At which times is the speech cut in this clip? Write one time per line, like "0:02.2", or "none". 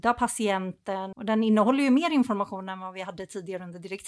0:01.1

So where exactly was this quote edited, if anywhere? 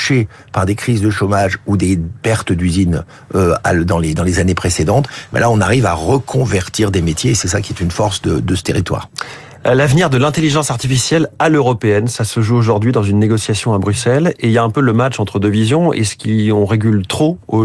none

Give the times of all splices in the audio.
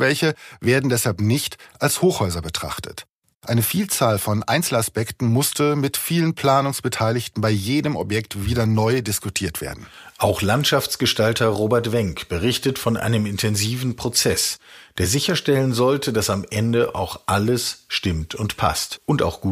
0:03.3

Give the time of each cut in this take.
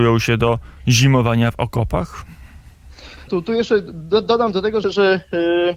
0:03.3
0:04.8

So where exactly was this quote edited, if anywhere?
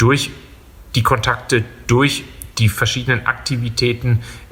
none

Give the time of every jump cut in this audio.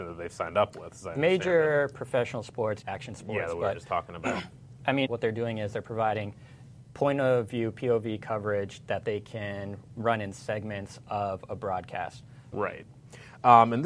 0:02.8
0:05.1
0:12.5

